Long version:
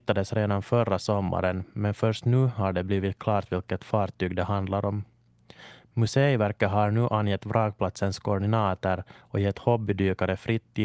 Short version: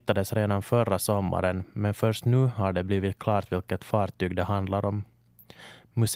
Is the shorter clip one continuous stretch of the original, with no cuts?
yes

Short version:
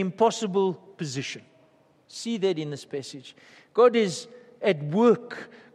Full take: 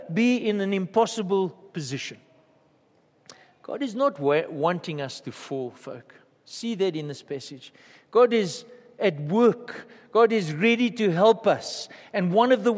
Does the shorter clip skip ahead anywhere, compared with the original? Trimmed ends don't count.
yes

